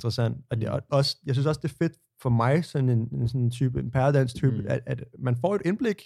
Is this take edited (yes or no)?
no